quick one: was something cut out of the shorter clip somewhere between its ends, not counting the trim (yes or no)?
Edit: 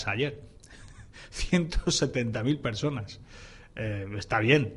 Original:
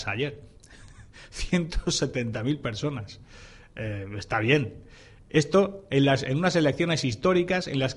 no